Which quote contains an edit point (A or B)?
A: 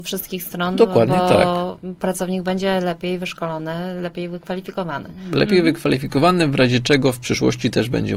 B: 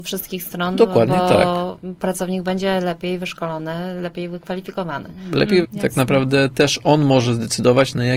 B